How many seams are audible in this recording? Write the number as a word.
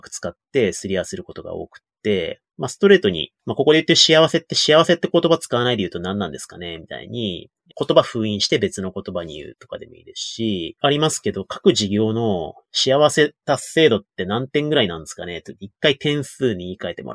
one